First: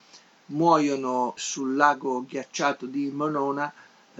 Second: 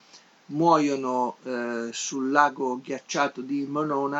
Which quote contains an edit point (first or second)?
first